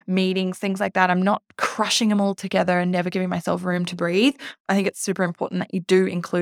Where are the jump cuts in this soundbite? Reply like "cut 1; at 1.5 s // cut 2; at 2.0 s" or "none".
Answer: none

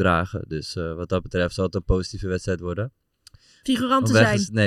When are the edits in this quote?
cut 1; at 3.6 s

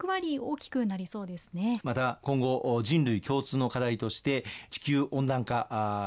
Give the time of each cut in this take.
cut 1; at 1.8 s

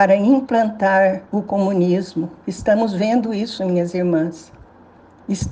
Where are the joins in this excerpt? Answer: cut 1; at 1.3 s

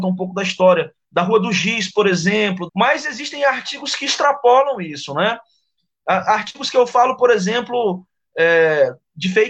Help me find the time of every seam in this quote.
cut 1; at 1.0 s // cut 2; at 2.7 s

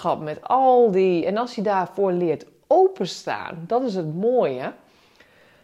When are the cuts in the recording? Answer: none

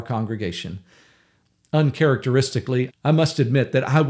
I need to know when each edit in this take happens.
cut 1; at 2.9 s

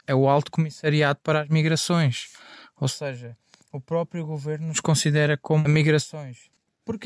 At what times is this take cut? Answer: cut 1; at 5.7 s

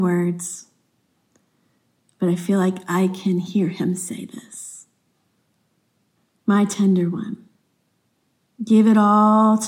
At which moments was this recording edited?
none

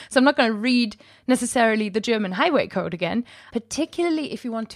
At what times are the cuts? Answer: cut 1; at 3.5 s

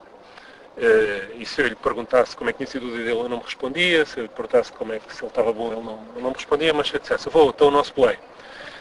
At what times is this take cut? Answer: none

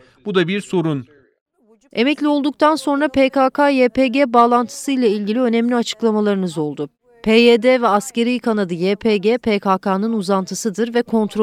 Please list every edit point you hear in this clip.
none

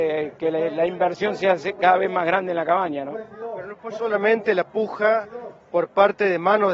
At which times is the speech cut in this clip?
none

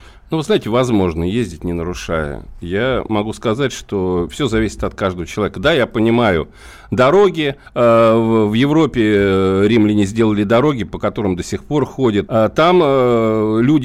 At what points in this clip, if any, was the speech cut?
cut 1; at 7.7 s // cut 2; at 12.3 s

